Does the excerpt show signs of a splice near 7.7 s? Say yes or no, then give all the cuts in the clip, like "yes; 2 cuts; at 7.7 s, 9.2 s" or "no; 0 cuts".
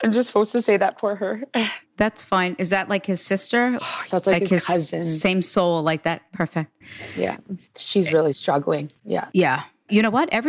no; 1 cut; at 4.1 s